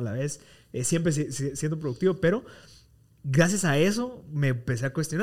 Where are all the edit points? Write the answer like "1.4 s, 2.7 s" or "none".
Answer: none